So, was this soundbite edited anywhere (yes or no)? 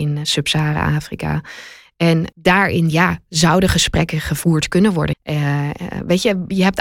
yes